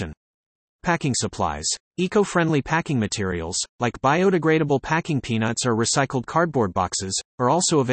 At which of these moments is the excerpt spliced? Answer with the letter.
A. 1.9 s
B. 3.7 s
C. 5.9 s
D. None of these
A